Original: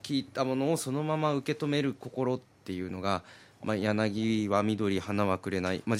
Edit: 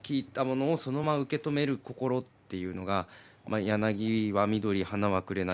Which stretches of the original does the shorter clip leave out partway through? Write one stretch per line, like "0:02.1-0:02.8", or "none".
0:01.0-0:01.2